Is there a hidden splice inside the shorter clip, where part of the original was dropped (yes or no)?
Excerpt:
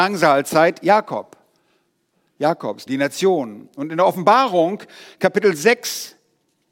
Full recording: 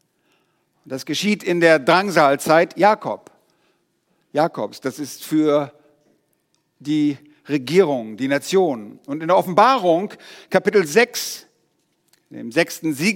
yes